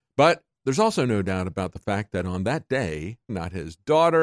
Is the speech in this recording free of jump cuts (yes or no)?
no